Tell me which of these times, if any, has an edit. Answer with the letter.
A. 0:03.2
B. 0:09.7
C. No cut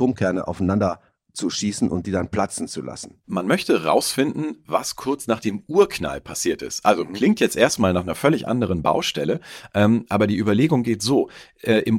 A